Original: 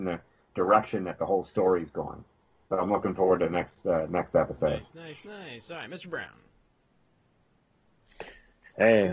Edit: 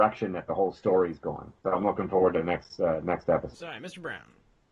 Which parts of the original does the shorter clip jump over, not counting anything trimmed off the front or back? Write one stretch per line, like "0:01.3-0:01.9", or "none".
0:02.3-0:02.6
0:04.6-0:05.6